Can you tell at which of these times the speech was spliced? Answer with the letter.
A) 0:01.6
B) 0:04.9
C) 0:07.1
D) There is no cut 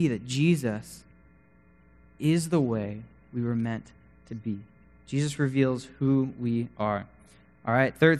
D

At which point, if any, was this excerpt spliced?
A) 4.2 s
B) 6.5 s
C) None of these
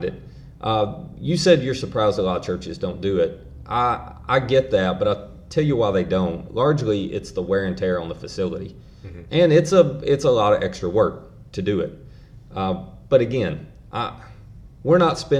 C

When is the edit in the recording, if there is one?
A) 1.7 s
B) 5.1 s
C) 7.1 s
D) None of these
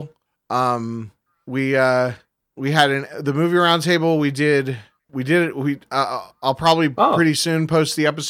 B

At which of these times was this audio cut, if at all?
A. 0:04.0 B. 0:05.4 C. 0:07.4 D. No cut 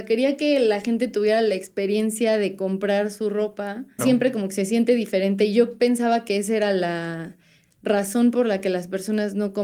A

